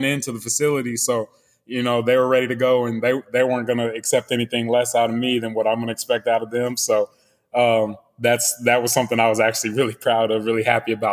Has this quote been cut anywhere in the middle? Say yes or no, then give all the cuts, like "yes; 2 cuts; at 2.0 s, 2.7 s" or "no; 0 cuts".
no; 0 cuts